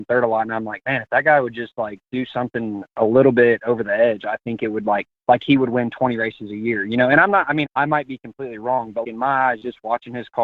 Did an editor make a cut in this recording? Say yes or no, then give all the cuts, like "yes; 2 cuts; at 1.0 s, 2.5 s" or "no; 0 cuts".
yes; 2 cuts; at 7.6 s, 9.0 s